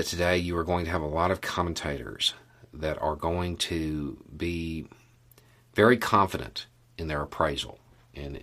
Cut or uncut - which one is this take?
uncut